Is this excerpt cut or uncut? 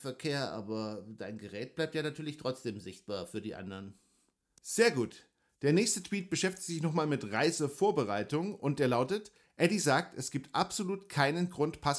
uncut